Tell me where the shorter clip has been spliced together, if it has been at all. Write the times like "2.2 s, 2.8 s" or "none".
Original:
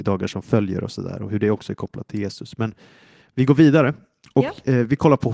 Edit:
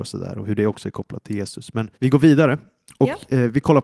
1.9 s